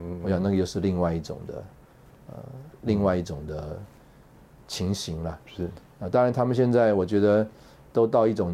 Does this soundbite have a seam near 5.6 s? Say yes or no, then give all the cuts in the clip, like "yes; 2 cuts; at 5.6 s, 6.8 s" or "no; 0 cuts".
no; 1 cut; at 2.7 s